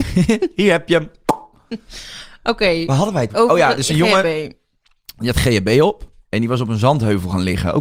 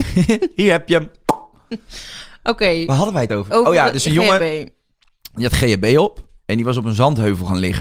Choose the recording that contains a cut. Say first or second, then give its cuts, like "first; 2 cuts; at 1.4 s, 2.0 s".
first; 1 cut; at 3.3 s